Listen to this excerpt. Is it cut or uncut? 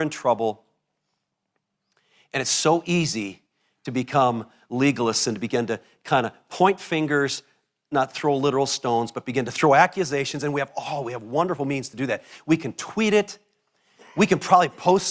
uncut